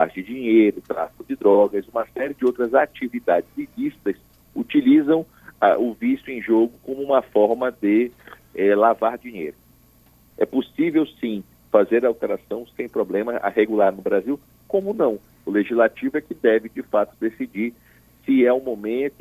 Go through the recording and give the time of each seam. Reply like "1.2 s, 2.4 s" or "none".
10.3 s, 15.3 s